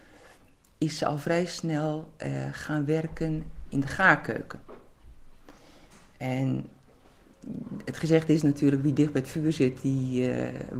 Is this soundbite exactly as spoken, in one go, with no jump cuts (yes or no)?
yes